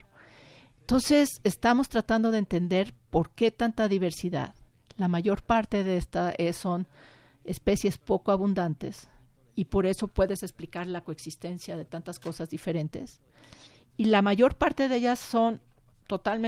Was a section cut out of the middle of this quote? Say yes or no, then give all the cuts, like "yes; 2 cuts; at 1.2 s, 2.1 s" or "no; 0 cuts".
no; 0 cuts